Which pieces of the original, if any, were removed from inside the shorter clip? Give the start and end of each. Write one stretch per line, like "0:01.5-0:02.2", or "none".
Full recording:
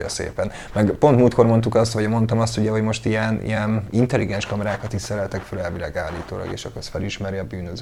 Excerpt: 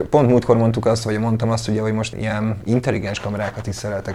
0:03.0-0:03.4